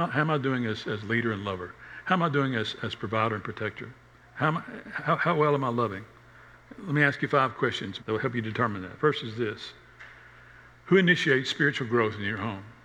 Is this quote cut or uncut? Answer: cut